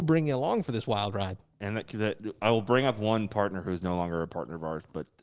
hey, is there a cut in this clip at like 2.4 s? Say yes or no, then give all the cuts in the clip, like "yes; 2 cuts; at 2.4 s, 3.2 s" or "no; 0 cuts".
no; 0 cuts